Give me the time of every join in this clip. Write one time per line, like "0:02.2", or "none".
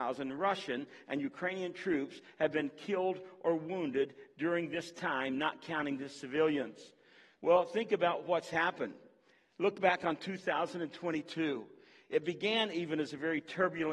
0:07.3